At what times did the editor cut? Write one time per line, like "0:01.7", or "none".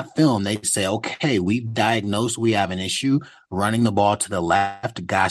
none